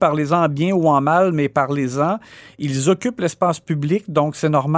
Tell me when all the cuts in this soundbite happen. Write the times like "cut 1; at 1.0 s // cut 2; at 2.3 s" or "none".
none